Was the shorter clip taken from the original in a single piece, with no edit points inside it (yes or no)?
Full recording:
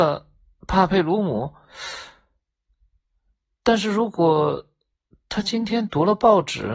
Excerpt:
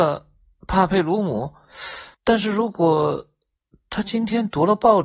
no